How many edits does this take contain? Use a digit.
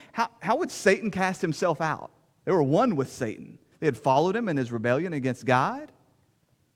2